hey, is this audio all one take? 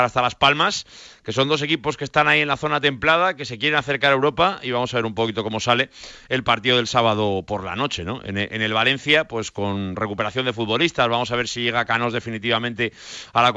yes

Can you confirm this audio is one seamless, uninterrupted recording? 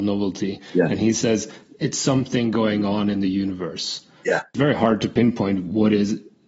yes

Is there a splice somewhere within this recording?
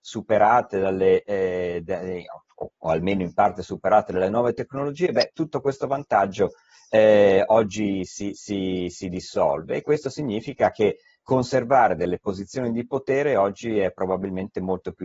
no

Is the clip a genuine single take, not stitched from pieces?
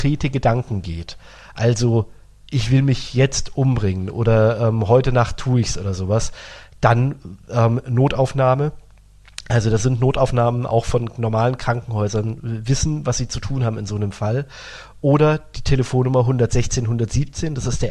yes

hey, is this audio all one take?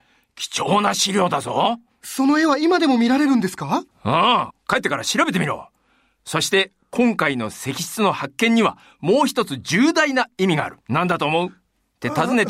no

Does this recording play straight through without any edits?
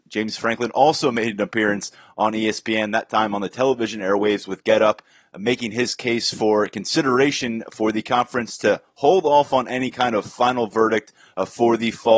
yes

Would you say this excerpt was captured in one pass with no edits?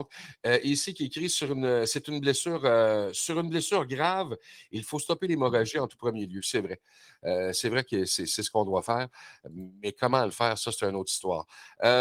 yes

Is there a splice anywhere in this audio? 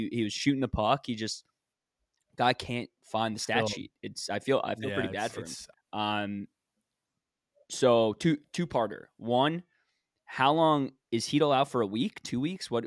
yes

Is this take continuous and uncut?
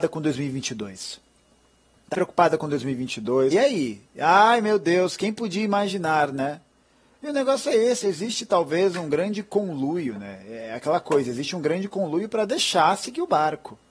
no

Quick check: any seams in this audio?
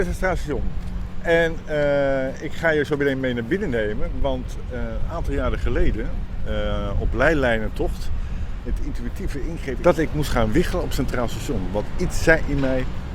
yes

